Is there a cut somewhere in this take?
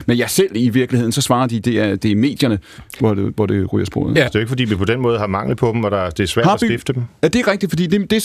yes; 1 cut; at 4.3 s

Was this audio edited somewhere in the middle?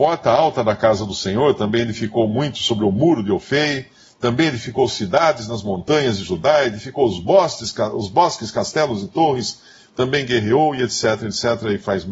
no; 0 cuts

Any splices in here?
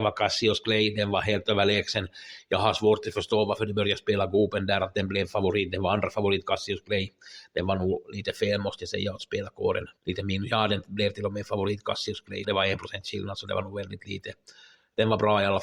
yes; 2 cuts; at 10.0 s, 12.4 s

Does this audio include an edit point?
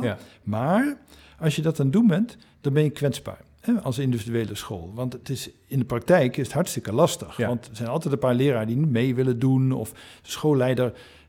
no; 0 cuts

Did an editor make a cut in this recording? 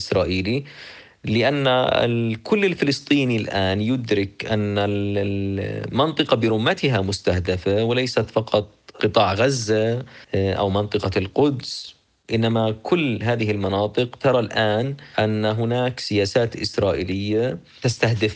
yes; 1 cut; at 10.2 s

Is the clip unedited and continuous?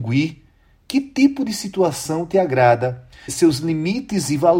no; 1 cut; at 3.3 s

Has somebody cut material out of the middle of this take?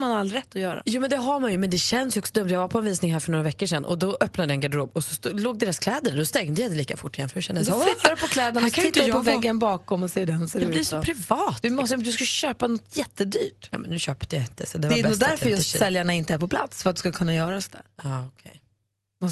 no; 0 cuts

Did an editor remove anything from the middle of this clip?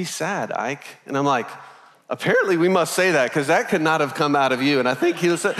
no; 0 cuts

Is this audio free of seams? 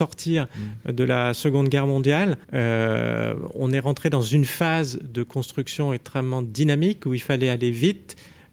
no; 1 cut; at 2.4 s

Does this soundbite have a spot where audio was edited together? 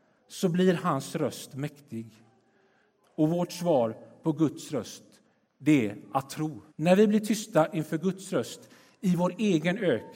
yes; 2 cuts; at 3.0 s, 6.7 s

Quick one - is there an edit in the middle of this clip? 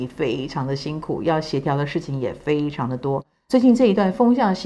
no; 0 cuts

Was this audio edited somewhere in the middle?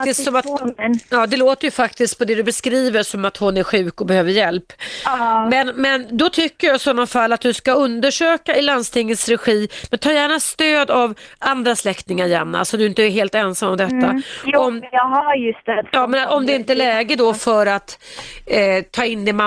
no; 0 cuts

